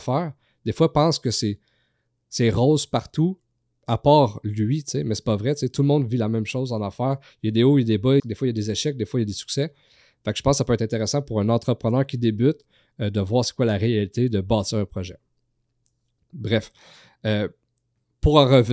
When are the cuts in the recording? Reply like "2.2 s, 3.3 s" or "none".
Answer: 8.2 s